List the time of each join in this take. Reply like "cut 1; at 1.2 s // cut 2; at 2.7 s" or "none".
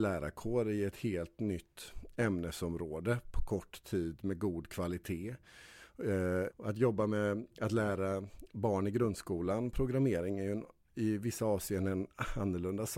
cut 1; at 6.5 s